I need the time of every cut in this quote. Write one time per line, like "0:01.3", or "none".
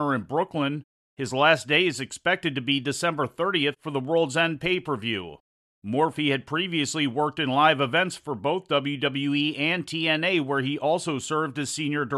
none